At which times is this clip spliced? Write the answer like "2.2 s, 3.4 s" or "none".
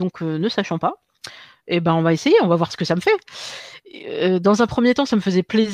none